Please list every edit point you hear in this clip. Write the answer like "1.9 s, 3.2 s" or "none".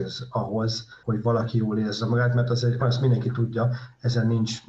1.0 s, 2.8 s